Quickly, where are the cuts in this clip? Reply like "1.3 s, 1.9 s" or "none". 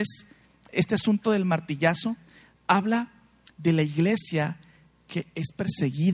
none